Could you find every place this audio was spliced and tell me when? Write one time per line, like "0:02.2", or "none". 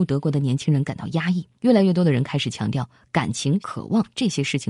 0:01.5
0:03.6